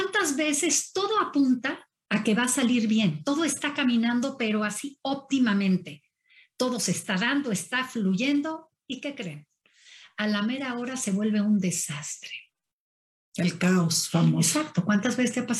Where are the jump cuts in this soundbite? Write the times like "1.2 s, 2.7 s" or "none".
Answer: none